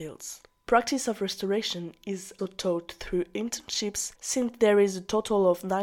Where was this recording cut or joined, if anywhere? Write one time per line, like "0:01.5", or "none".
0:02.4
0:04.2